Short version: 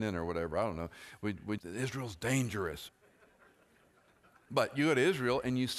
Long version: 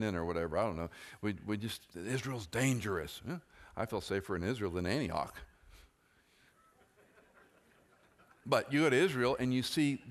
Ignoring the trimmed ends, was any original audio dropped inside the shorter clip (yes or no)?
yes